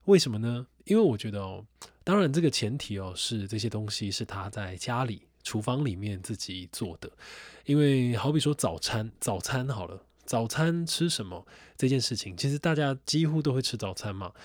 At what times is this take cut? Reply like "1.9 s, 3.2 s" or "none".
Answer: none